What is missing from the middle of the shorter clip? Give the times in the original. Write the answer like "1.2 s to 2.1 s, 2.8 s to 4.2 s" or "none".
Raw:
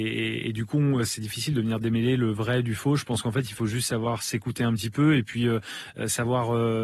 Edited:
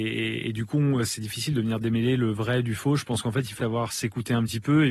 3.6 s to 3.9 s